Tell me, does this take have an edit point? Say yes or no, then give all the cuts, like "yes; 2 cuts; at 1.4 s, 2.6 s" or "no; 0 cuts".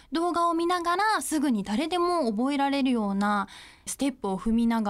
yes; 1 cut; at 3.9 s